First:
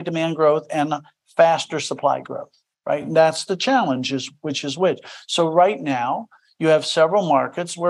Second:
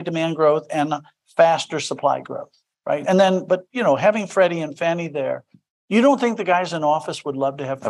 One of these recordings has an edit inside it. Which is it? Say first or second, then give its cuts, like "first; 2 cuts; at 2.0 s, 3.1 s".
second; 1 cut; at 3.0 s